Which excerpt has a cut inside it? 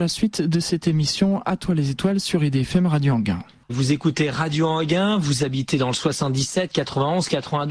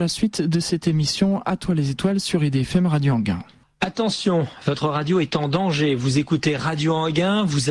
first; 1 cut; at 3.7 s

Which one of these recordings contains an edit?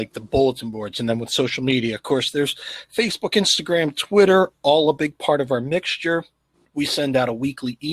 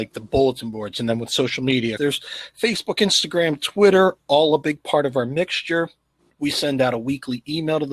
second; 1 cut; at 2.0 s

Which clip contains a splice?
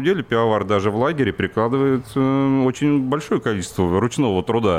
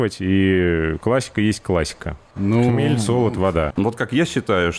second; 1 cut; at 3.7 s

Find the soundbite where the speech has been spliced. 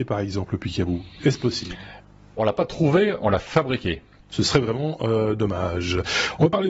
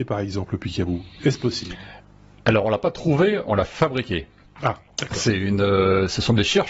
first; 2 cuts; at 2.4 s, 4.3 s

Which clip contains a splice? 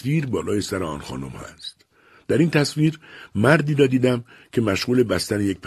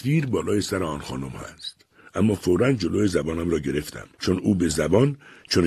second; 2 cuts; at 2.0 s, 4.1 s

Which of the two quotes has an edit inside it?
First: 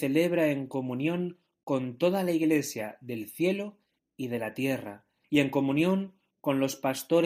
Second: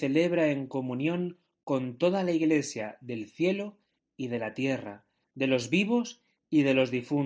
first; 1 cut; at 5.2 s

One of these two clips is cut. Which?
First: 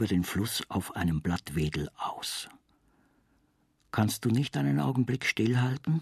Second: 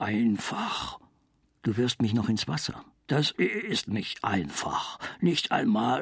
second; 2 cuts; at 1.5 s, 3.1 s

